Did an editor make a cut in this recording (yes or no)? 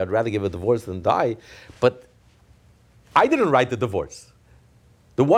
no